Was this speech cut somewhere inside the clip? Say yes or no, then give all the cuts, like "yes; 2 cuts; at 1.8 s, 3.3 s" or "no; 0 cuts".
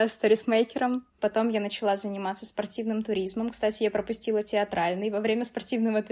yes; 1 cut; at 1.2 s